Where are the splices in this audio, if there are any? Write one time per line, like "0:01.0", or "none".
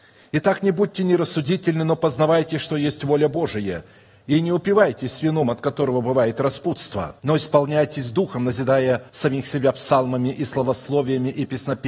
0:07.2
0:09.1